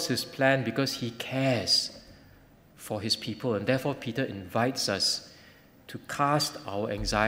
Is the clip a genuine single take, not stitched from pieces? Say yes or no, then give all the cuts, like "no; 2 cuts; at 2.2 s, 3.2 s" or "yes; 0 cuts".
yes; 0 cuts